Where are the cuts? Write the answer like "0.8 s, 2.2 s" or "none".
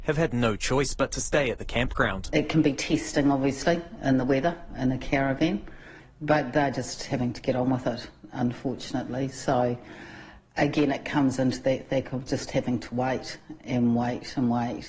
none

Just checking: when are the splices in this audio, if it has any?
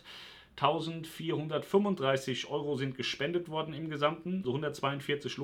4.4 s

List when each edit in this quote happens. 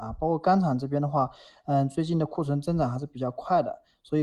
none

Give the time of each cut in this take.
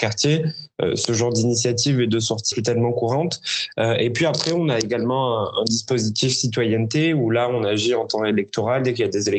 2.5 s

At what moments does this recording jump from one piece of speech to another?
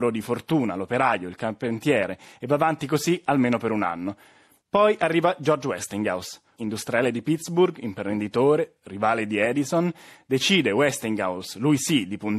none

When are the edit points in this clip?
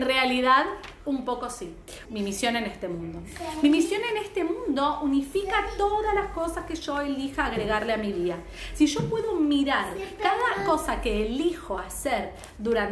2.1 s

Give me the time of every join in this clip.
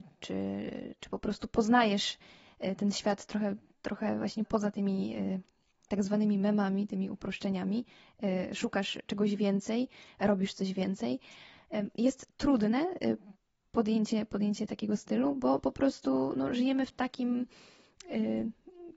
4.4 s

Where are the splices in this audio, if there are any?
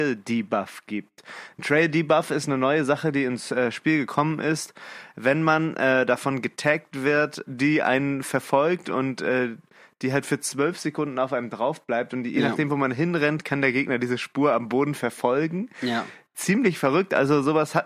7.5 s

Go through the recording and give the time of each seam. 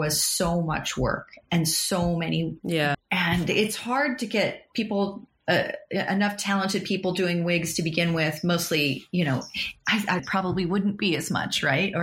2.9 s, 10.2 s

